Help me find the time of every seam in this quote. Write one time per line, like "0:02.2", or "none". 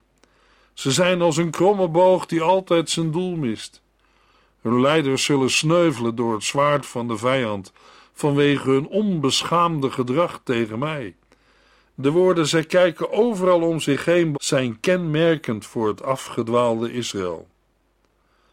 0:11.9
0:14.3